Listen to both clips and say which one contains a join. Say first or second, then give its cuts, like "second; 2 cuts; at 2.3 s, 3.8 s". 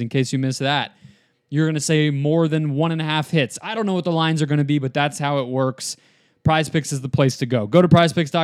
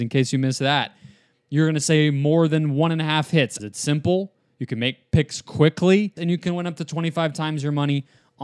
second; 2 cuts; at 3.6 s, 6.2 s